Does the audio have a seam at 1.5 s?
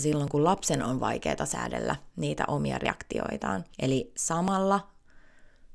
no; 1 cut; at 3.7 s

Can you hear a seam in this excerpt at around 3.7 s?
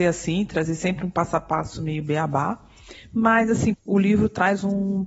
yes; 1 cut; at 3.7 s

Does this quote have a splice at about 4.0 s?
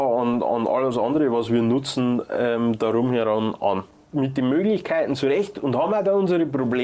yes; 1 cut; at 4.0 s

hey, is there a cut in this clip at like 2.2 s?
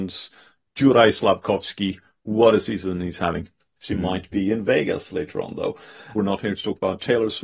no; 2 cuts; at 3.8 s, 6.2 s

